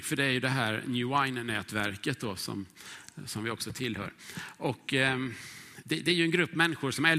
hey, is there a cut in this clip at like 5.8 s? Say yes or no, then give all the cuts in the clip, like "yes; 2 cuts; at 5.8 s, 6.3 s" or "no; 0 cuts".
yes; 1 cut; at 5.8 s